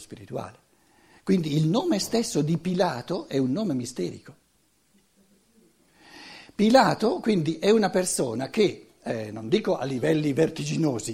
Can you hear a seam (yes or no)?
no